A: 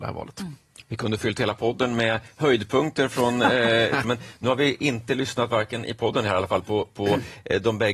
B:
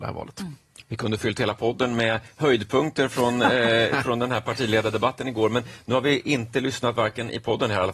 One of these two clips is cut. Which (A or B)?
A